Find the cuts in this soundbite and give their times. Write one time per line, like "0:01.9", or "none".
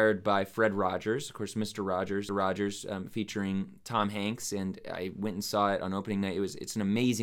0:02.3

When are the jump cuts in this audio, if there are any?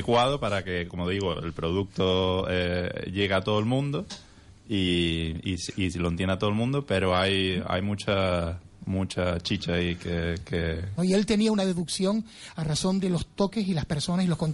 0:11.0

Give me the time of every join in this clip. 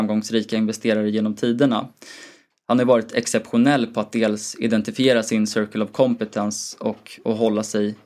none

